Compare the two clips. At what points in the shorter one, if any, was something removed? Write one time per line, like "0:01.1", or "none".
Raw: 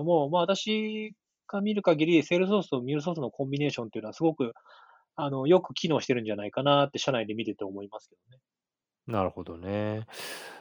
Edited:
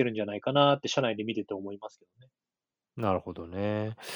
none